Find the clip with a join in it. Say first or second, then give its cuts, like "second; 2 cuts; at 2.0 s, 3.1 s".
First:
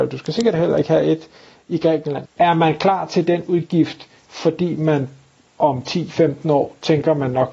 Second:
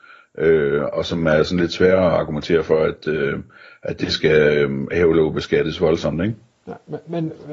first; 1 cut; at 2.2 s